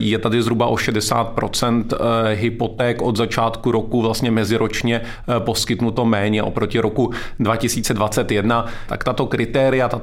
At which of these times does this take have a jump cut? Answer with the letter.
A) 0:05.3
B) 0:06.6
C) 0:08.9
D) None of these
C